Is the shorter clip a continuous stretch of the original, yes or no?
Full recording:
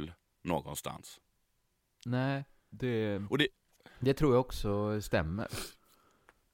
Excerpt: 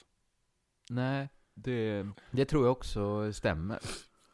no